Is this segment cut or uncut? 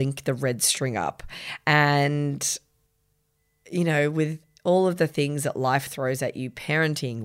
uncut